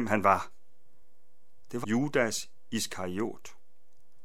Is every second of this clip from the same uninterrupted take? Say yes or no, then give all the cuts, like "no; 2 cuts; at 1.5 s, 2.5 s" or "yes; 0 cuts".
no; 1 cut; at 1.8 s